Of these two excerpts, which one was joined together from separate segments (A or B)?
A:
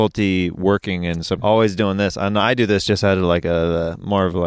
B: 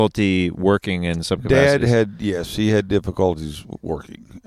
A